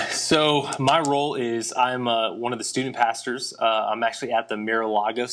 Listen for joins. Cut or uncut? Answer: uncut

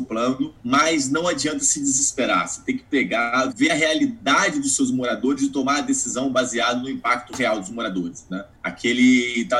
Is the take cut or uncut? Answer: cut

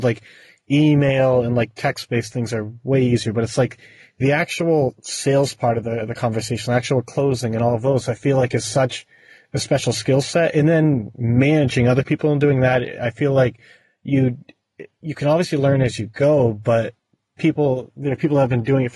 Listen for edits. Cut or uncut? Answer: uncut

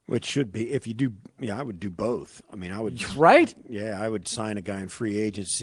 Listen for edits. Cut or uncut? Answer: uncut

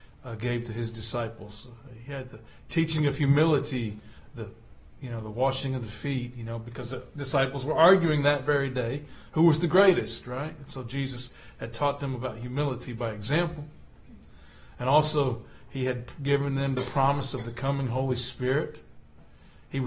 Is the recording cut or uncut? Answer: uncut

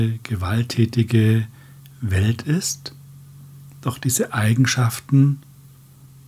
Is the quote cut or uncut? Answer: uncut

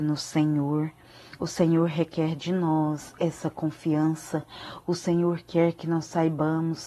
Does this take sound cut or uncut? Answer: cut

